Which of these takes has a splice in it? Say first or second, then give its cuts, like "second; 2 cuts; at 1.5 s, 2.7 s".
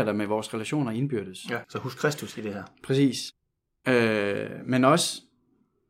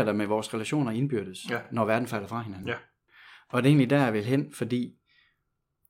first; 1 cut; at 1.6 s